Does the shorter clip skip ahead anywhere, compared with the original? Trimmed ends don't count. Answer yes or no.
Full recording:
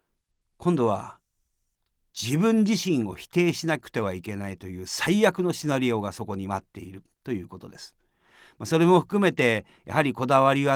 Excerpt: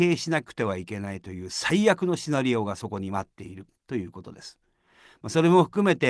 no